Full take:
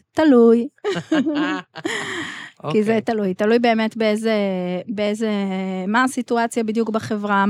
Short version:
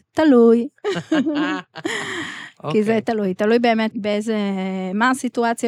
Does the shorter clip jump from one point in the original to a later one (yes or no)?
yes